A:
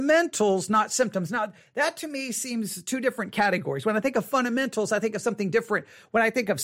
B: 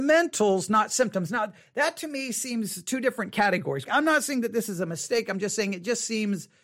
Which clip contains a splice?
B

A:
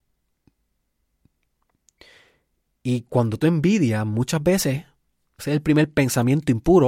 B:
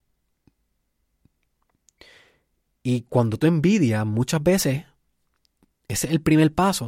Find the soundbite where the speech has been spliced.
A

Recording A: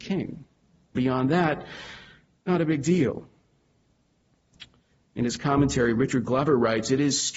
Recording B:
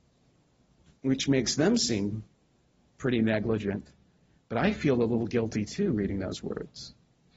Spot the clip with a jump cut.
A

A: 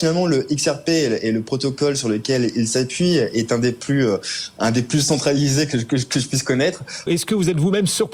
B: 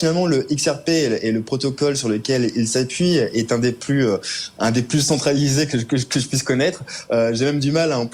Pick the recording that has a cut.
A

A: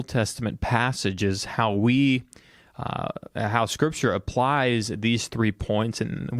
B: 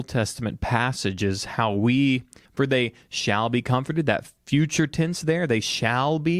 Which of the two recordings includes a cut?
B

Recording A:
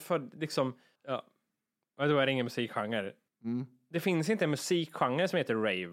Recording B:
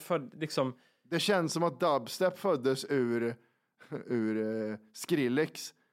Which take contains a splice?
A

